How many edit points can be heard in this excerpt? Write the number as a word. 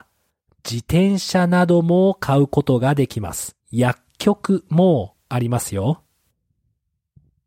one